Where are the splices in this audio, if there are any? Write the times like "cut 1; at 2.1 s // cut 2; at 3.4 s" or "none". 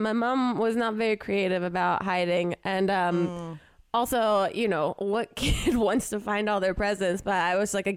none